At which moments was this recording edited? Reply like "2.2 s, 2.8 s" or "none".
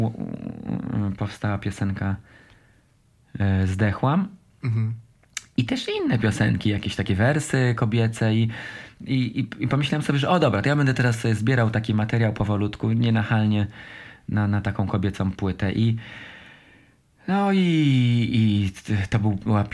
none